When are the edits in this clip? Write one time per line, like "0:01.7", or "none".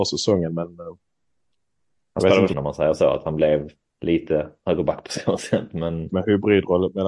0:02.5
0:06.1